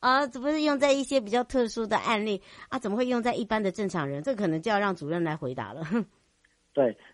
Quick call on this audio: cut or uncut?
uncut